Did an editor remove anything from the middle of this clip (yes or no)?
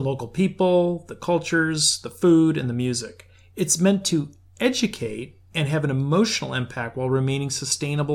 no